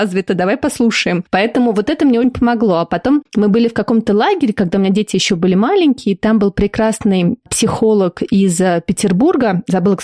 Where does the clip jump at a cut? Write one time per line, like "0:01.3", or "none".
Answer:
0:02.2